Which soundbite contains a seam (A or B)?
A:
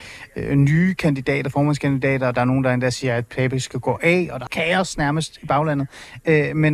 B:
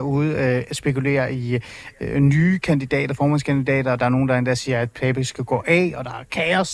A